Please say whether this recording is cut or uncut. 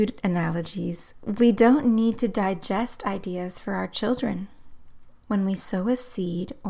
cut